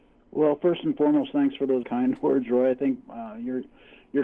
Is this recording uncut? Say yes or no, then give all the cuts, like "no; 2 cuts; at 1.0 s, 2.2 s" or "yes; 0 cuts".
no; 2 cuts; at 1.8 s, 3.0 s